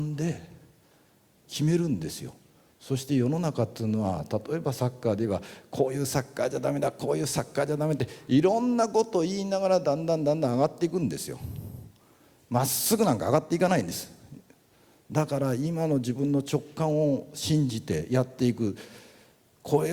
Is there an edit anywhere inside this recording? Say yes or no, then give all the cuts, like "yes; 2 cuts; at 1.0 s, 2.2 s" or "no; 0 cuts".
no; 0 cuts